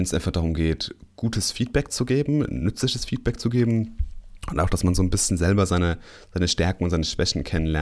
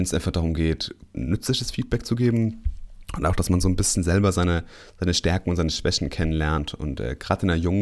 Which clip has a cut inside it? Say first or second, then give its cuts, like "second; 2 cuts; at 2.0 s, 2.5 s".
second; 1 cut; at 1.1 s